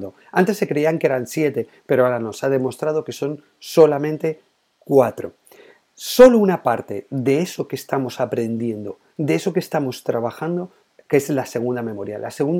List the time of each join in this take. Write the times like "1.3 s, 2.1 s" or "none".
11.0 s